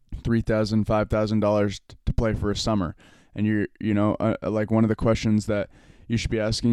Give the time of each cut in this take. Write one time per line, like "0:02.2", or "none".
none

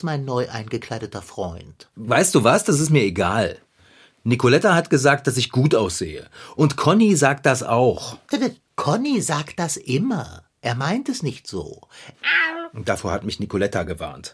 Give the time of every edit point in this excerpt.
0:12.1

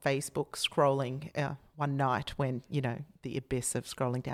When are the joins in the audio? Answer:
none

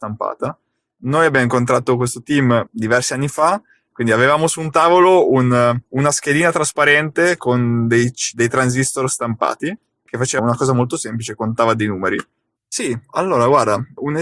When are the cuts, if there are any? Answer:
0:03.9
0:10.4
0:12.6

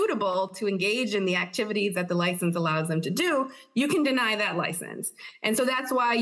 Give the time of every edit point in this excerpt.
none

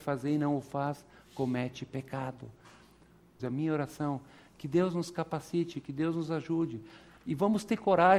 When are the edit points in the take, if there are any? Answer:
0:03.4

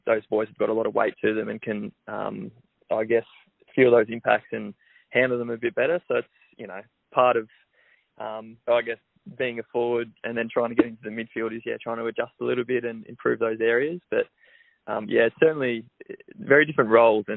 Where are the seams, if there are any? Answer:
0:08.6

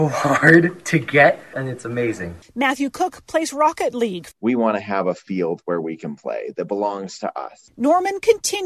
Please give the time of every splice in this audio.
0:04.3

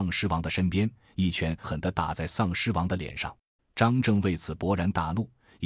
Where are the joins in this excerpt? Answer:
0:01.6
0:03.6

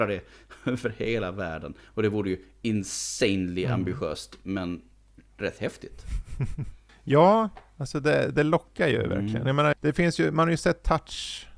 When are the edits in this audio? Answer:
0:09.7

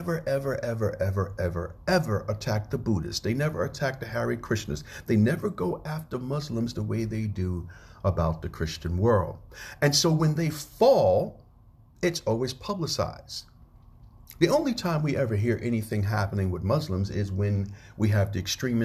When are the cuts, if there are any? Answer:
none

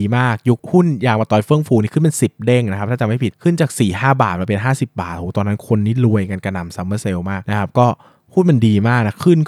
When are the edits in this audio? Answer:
none

